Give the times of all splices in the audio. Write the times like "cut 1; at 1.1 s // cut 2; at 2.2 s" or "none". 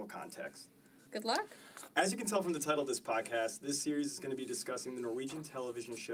cut 1; at 1.1 s